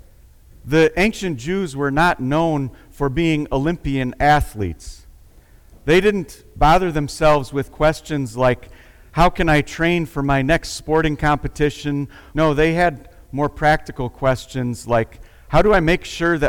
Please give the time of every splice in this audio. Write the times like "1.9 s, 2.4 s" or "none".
12.3 s

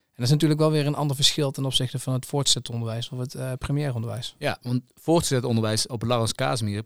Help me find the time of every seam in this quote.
5.9 s

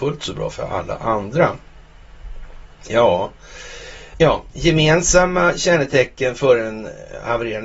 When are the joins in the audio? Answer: 4.1 s

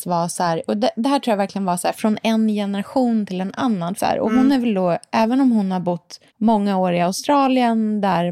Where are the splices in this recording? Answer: 4.0 s, 6.3 s

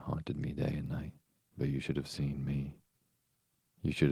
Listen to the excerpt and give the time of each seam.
1.4 s

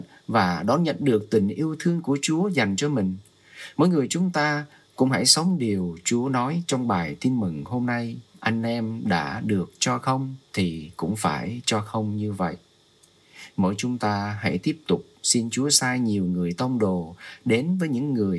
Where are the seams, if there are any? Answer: 8.3 s, 10.4 s

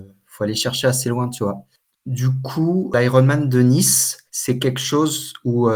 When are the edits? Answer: 1.9 s, 4.3 s

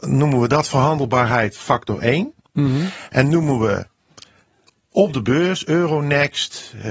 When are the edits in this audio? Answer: none

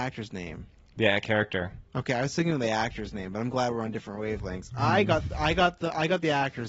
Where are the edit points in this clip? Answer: none

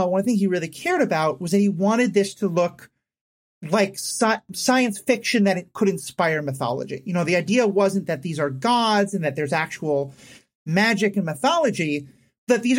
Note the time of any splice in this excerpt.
none

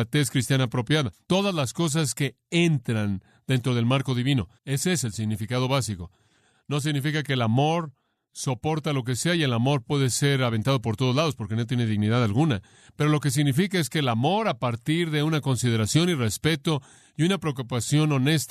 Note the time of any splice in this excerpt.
4.6 s

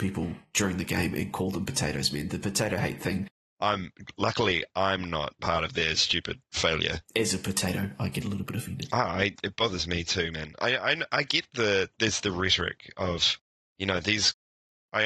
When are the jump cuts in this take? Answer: 3.5 s, 7.1 s

